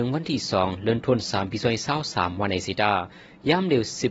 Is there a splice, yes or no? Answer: no